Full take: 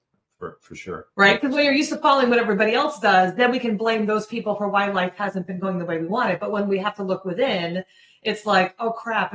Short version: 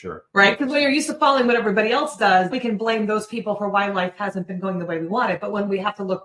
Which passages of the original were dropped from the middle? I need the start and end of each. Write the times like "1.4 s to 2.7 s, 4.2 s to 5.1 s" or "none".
3.4 s to 3.5 s